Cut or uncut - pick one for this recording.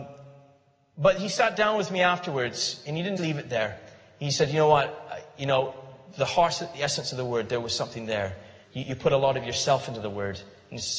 cut